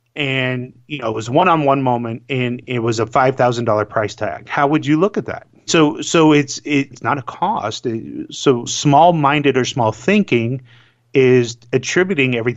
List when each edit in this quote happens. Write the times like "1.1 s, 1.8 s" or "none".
5.7 s, 6.9 s, 8.7 s

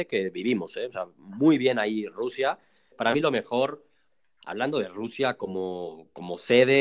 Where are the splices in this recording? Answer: 2.9 s

